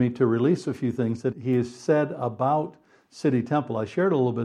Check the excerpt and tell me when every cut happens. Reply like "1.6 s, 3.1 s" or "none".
1.3 s